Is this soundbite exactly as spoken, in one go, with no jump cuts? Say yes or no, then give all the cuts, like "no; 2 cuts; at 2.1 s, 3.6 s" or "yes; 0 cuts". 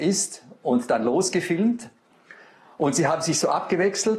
yes; 0 cuts